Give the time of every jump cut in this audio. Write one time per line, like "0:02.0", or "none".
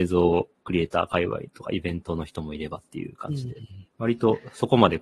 0:03.9